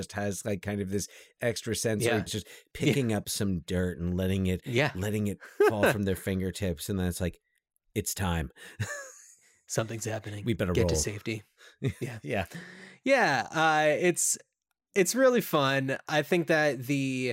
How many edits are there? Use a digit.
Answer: 1